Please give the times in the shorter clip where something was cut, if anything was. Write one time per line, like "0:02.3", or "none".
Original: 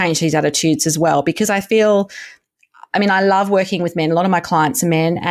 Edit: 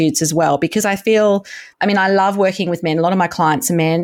0:01.7